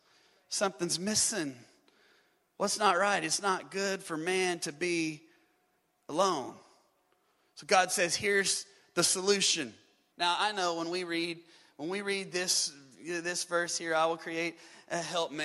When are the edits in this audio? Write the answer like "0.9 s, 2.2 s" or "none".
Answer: 10.1 s